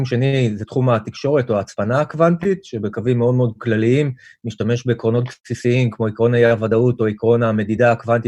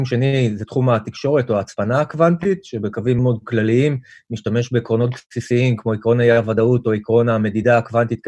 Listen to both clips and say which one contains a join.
second; 1 cut; at 3.2 s

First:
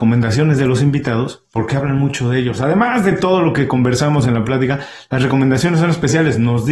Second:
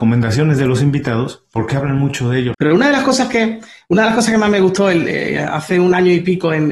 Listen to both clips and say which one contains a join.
second; 1 cut; at 2.5 s

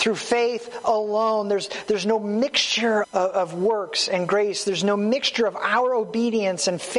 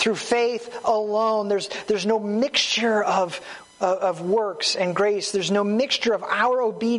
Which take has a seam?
first; 1 cut; at 3.0 s

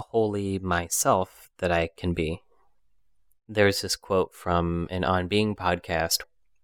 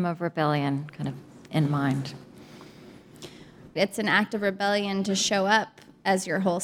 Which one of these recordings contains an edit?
second; 1 cut; at 3.8 s

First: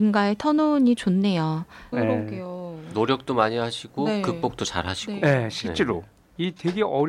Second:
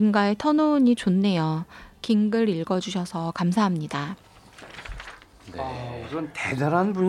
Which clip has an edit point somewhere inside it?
first; 1 cut; at 1.9 s

